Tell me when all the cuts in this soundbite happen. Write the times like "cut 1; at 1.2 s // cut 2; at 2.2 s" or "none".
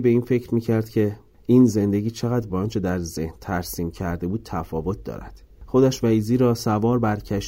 none